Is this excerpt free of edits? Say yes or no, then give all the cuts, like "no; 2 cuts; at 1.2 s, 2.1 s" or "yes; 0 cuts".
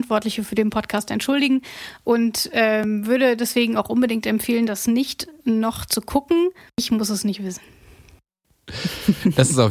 no; 1 cut; at 6.7 s